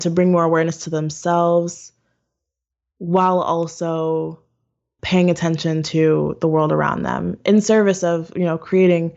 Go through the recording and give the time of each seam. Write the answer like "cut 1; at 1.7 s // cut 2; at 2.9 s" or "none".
none